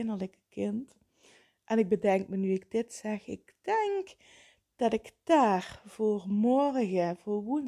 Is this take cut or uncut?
uncut